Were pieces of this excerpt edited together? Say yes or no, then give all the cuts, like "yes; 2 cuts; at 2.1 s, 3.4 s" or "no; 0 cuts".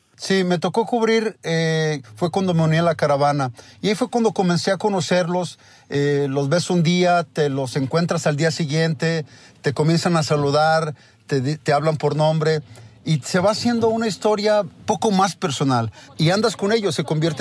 yes; 1 cut; at 2.0 s